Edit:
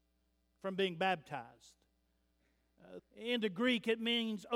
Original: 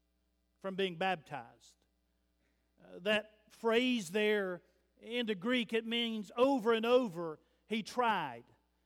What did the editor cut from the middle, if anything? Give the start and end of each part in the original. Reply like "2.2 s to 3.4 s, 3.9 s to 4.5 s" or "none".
3.0 s to 4.9 s